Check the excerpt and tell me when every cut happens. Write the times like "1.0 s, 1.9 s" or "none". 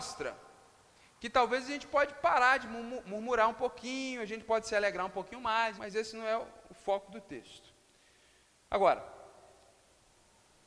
5.8 s